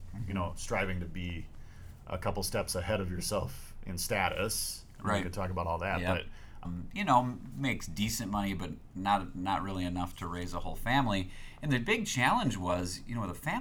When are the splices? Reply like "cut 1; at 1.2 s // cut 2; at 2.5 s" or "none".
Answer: cut 1; at 6.6 s